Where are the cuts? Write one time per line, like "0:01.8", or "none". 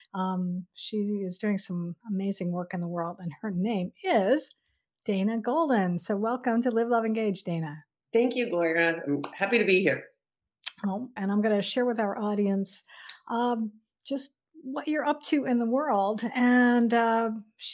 0:11.2